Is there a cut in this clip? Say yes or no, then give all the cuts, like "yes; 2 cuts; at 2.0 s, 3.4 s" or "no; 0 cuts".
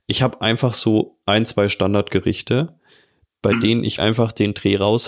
yes; 1 cut; at 4.0 s